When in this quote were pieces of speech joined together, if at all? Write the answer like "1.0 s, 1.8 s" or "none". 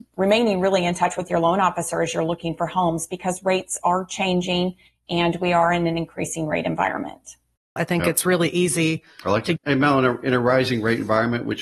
7.8 s, 9.6 s